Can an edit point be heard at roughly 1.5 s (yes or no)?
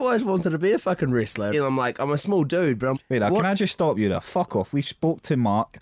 yes